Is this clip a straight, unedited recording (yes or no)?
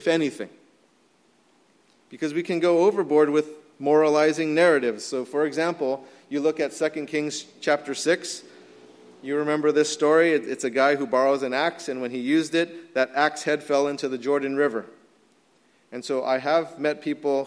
yes